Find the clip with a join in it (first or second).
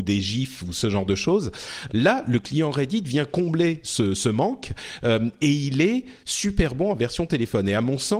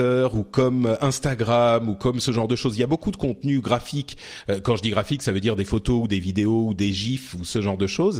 first